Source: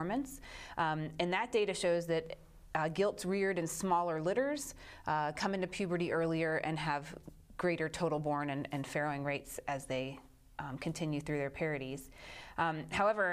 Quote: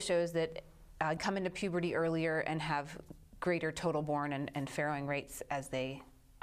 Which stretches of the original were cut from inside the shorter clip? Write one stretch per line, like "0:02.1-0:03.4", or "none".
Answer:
0:02.9-0:05.3